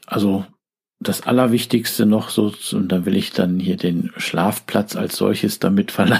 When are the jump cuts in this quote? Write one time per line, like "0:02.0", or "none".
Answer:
none